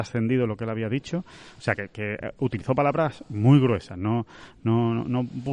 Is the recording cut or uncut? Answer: uncut